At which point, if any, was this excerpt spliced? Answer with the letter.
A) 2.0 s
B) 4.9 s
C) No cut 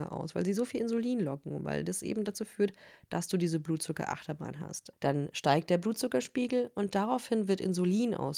B